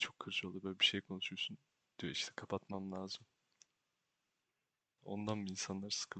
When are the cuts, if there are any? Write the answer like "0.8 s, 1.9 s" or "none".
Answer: 5.0 s